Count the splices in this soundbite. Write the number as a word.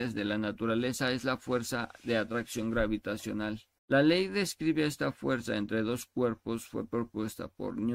one